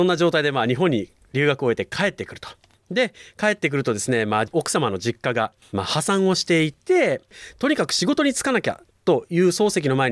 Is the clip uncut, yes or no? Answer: yes